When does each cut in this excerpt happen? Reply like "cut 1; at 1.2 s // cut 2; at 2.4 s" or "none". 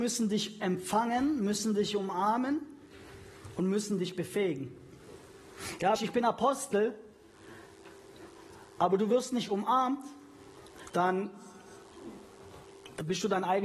cut 1; at 6.0 s // cut 2; at 10.9 s